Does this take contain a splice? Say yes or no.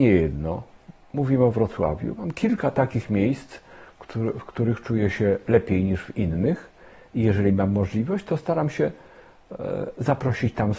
no